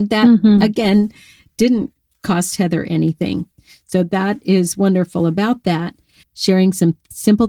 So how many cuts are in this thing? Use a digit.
1